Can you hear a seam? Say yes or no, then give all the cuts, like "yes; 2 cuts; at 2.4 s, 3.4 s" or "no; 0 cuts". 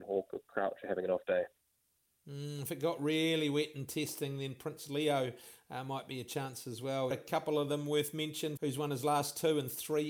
yes; 2 cuts; at 7.1 s, 8.6 s